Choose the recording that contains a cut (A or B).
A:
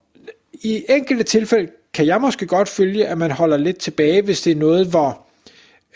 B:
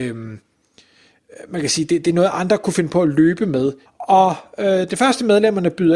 B